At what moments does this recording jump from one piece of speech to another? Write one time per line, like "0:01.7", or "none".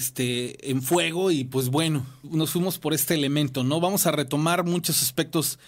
0:02.2